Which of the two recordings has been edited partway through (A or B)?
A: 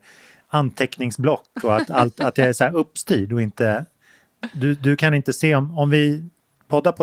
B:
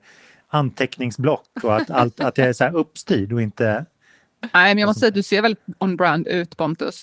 B